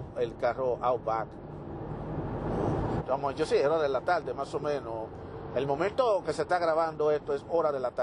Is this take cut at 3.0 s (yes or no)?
yes